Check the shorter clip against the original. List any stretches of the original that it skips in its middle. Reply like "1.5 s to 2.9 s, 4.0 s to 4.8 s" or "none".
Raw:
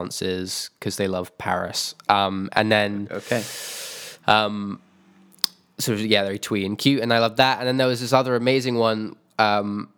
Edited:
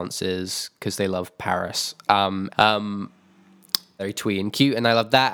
2.5 s to 4.2 s, 5.7 s to 6.2 s